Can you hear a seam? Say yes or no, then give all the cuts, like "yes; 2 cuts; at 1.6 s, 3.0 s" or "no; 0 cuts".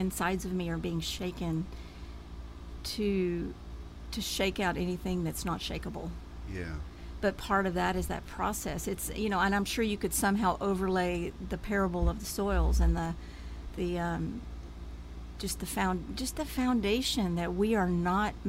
no; 0 cuts